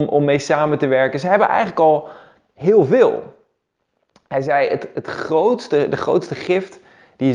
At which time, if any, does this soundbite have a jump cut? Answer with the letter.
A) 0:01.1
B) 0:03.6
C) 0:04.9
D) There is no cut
D